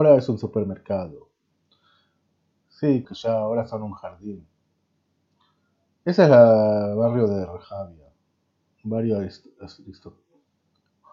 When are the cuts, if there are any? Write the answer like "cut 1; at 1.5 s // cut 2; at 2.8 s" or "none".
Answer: cut 1; at 3.0 s